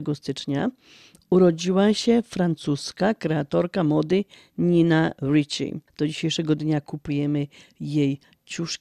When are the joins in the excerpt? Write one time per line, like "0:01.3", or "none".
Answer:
0:05.9